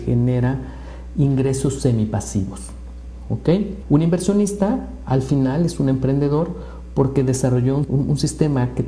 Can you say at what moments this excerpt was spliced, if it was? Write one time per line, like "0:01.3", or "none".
0:03.8